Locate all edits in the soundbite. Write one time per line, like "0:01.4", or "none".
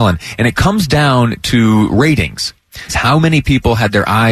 0:02.9